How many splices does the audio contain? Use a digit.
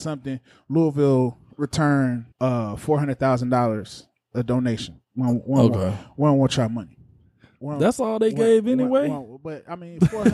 1